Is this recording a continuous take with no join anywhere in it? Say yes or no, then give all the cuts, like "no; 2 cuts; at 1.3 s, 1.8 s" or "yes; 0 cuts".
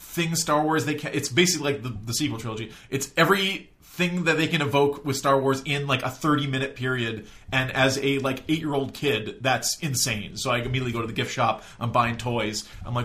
yes; 0 cuts